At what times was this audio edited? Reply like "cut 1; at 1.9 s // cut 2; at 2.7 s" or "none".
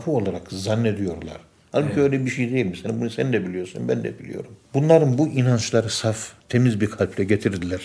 cut 1; at 4.6 s // cut 2; at 6.4 s